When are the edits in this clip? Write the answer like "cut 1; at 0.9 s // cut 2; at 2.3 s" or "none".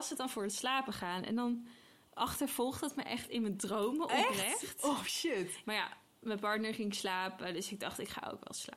cut 1; at 5.6 s

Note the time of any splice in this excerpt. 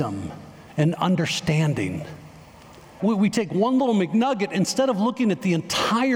cut 1; at 3.0 s

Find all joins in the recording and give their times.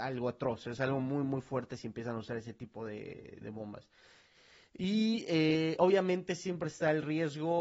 cut 1; at 3.4 s

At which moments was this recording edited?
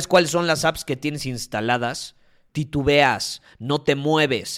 cut 1; at 2.5 s

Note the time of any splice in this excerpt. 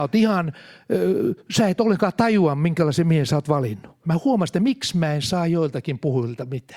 cut 1; at 4.0 s

